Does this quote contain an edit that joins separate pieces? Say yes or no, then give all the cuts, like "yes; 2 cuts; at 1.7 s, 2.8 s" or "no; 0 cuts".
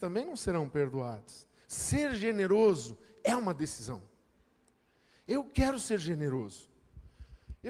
yes; 1 cut; at 1.6 s